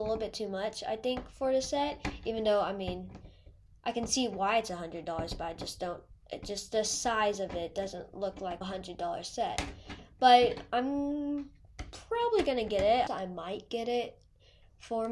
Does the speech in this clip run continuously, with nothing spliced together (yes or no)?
no